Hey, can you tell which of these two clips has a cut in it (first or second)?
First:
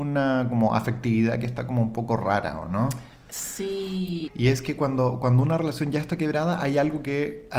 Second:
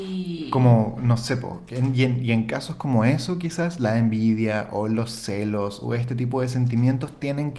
first